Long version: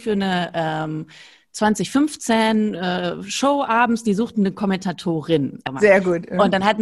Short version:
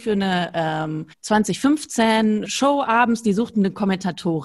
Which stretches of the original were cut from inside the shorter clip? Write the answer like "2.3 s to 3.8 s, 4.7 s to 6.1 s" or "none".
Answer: 1.1 s to 1.4 s, 2.8 s to 3.3 s